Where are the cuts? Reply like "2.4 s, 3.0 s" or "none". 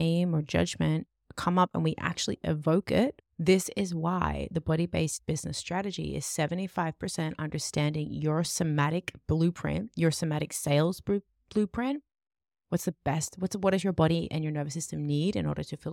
3.2 s